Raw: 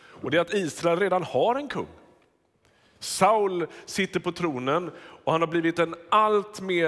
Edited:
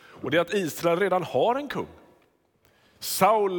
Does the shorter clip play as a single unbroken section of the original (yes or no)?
yes